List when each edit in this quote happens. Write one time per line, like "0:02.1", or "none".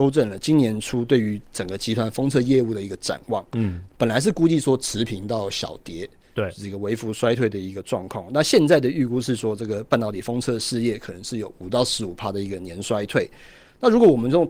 none